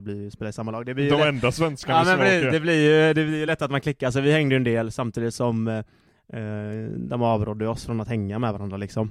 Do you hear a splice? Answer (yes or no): no